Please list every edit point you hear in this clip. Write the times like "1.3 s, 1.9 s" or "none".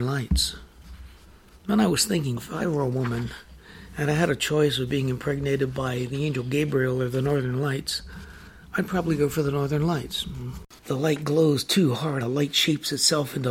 2.4 s, 10.8 s, 12.2 s